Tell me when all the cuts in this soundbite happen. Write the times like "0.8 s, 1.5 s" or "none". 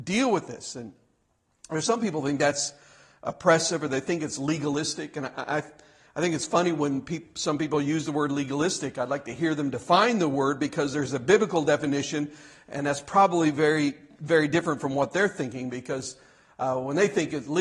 none